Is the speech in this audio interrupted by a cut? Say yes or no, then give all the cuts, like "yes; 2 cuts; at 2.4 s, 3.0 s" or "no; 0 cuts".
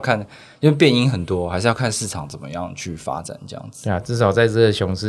no; 0 cuts